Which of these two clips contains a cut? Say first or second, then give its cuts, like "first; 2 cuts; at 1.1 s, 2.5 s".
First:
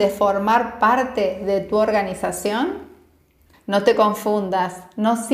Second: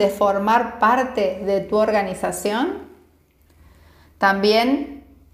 first; 1 cut; at 3.5 s